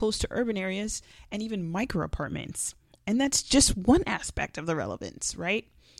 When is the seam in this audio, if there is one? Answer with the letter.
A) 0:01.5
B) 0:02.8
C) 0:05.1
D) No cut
D